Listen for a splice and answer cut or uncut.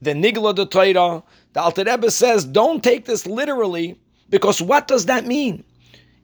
uncut